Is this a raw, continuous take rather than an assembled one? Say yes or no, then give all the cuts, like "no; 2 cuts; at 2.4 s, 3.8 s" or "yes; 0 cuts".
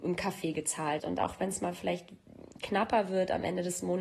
no; 1 cut; at 1.0 s